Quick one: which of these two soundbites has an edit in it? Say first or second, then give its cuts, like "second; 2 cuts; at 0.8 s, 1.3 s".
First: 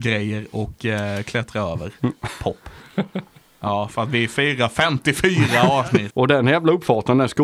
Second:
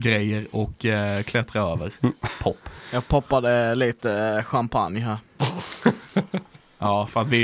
first; 2 cuts; at 2.8 s, 6.1 s